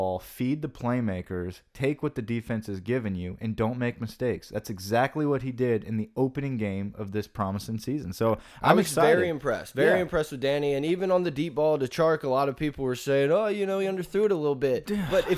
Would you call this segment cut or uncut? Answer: uncut